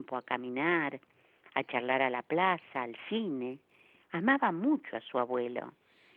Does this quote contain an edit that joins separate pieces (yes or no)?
no